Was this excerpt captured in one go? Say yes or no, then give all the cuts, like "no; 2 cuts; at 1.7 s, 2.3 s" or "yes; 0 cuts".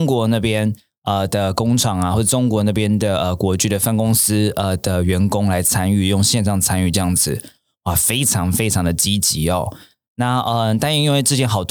yes; 0 cuts